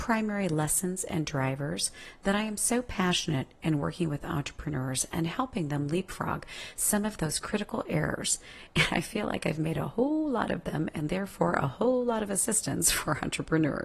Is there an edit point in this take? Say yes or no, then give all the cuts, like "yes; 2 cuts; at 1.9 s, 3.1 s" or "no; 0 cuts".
no; 0 cuts